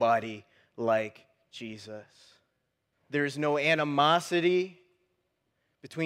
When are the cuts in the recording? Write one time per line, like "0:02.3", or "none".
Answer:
0:02.9